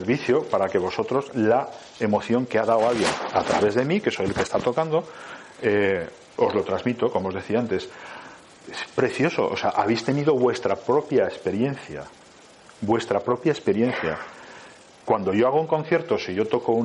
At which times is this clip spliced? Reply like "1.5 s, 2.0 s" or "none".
8.6 s, 14.9 s